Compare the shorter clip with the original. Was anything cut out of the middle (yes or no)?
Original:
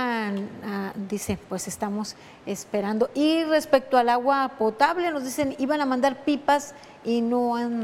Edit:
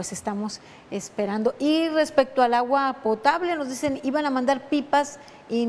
no